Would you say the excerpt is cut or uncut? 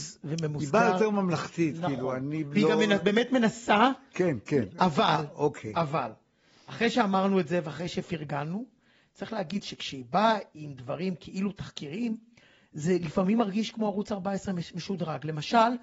uncut